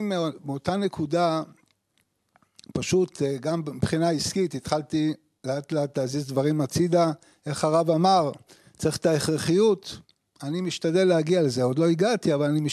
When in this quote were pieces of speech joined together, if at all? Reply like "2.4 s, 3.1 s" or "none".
none